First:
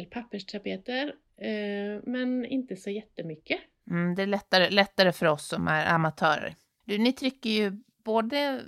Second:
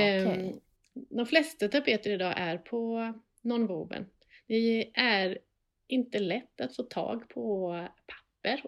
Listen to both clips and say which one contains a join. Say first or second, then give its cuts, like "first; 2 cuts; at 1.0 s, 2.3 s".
first; 1 cut; at 3.8 s